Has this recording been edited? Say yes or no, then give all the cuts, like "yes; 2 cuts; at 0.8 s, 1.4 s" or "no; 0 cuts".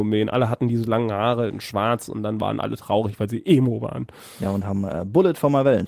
no; 0 cuts